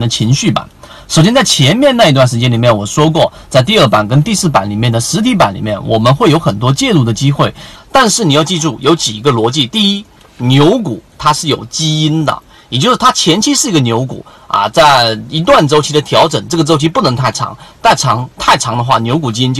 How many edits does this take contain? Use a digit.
1